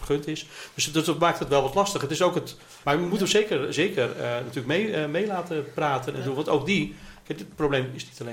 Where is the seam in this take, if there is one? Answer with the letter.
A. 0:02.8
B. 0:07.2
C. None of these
A